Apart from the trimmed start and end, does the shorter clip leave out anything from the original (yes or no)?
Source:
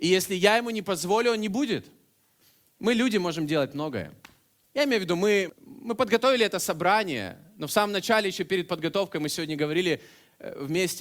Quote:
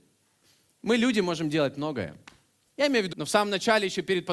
yes